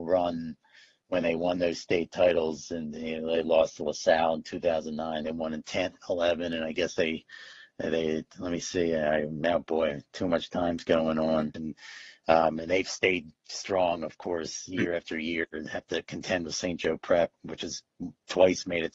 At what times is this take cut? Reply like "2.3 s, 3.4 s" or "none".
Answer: 11.5 s